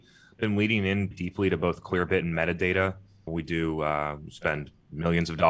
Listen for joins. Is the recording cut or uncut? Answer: cut